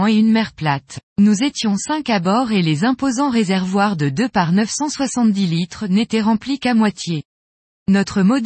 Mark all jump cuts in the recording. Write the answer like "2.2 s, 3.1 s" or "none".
1.1 s